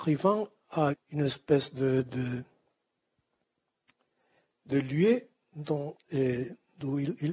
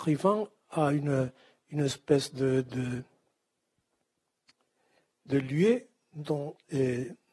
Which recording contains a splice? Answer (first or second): first